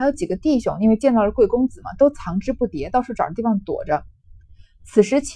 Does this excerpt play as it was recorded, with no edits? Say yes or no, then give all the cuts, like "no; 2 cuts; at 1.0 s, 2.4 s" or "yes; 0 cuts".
yes; 0 cuts